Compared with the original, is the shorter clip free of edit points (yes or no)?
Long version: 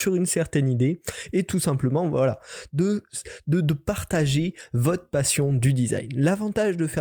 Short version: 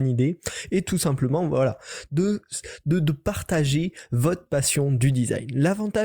yes